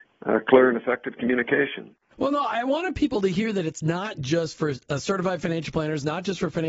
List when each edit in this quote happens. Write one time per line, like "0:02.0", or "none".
0:02.1